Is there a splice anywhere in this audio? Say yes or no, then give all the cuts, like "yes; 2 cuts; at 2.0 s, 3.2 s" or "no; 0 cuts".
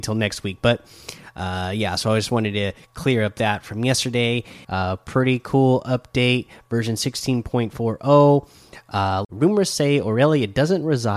yes; 2 cuts; at 4.6 s, 9.2 s